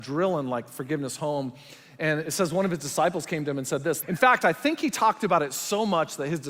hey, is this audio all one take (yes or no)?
no